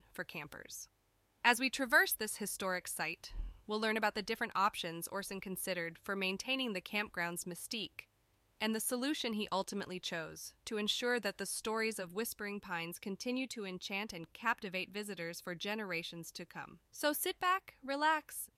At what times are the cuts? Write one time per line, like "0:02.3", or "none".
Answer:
0:16.8